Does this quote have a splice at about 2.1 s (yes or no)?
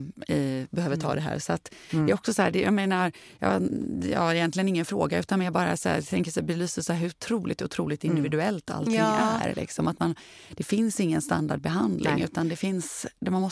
no